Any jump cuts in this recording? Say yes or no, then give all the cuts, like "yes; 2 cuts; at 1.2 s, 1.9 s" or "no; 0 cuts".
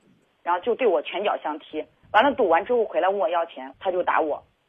yes; 2 cuts; at 2.0 s, 3.7 s